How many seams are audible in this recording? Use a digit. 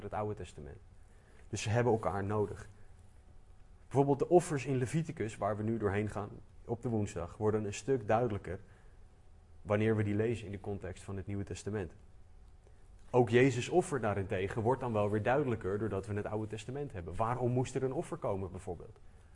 0